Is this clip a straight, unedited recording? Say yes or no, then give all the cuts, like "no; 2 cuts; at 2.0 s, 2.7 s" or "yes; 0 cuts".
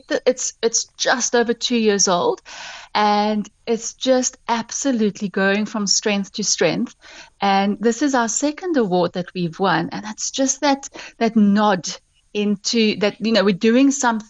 yes; 0 cuts